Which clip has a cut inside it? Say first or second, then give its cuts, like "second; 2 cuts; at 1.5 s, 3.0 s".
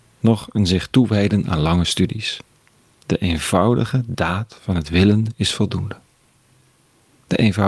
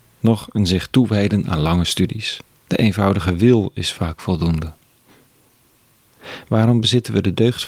second; 1 cut; at 2.6 s